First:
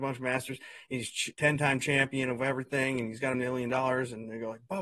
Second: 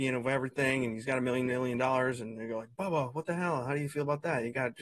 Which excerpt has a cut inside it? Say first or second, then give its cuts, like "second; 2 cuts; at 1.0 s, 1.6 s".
first; 2 cuts; at 1.3 s, 3.3 s